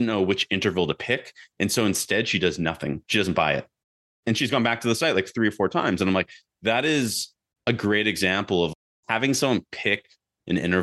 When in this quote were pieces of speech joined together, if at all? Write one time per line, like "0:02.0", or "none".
0:03.0